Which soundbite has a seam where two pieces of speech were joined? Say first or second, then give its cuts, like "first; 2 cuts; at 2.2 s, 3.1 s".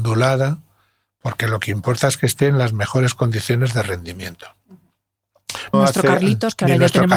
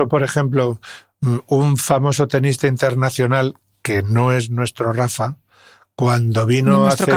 first; 1 cut; at 5.7 s